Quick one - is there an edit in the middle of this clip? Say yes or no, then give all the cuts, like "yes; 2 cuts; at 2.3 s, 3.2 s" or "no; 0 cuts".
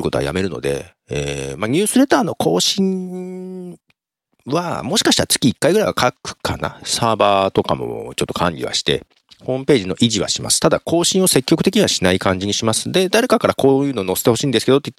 yes; 1 cut; at 6.8 s